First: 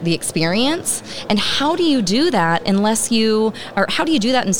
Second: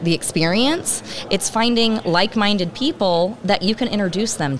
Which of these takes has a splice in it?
second; 1 cut; at 1.3 s

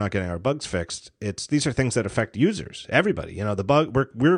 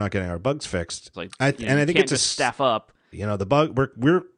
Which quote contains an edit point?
second; 2 cuts; at 1.1 s, 3.1 s

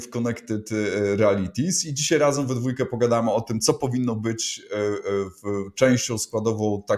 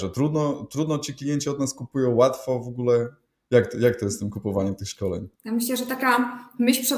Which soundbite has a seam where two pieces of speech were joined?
second; 1 cut; at 5.3 s

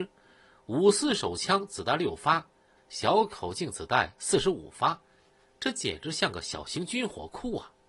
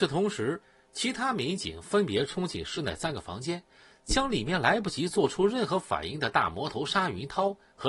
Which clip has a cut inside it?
first; 1 cut; at 2.8 s

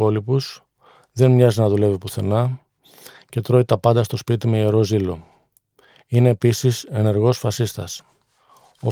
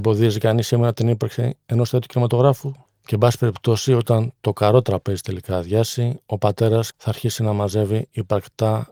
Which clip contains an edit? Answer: second; 2 cuts; at 2.9 s, 6.9 s

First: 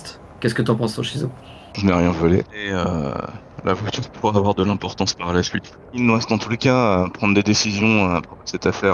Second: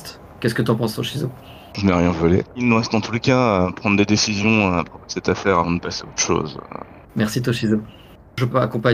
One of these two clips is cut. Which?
second; 2 cuts; at 2.5 s, 7.0 s

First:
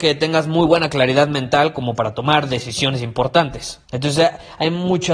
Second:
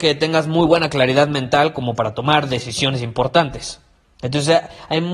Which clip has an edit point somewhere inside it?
first; 1 cut; at 3.8 s

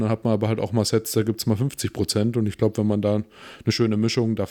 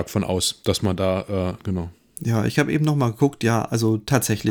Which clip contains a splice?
second; 1 cut; at 1.6 s

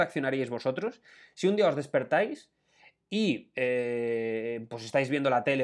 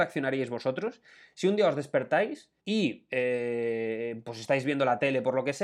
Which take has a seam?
second; 1 cut; at 2.6 s

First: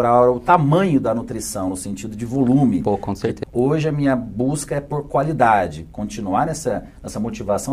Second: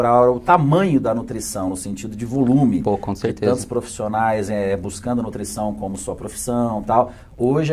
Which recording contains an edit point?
first; 1 cut; at 3.4 s

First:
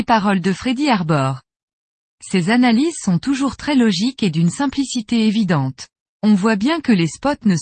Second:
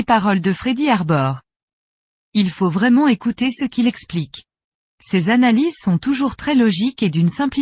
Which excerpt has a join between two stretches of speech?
first; 2 cuts; at 2.1 s, 6.1 s

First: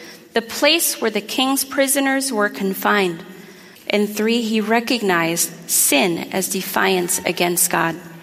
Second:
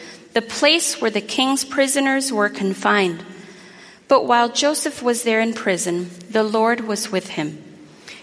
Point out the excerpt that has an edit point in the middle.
first; 1 cut; at 3.7 s

